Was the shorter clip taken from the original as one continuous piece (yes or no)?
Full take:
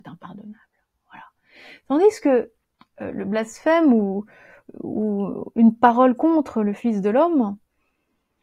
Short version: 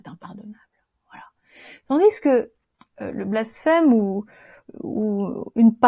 yes